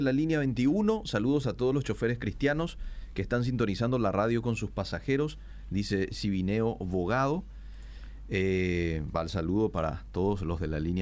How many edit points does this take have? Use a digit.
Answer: 1